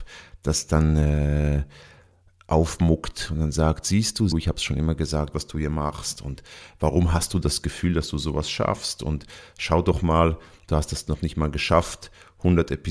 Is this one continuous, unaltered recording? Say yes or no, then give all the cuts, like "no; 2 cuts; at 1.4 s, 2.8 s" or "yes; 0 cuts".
no; 2 cuts; at 4.3 s, 5.3 s